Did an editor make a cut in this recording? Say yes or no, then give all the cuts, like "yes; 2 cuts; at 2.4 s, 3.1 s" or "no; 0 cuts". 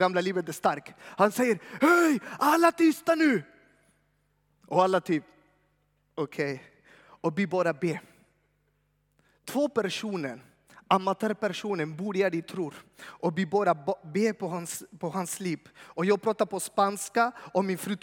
no; 0 cuts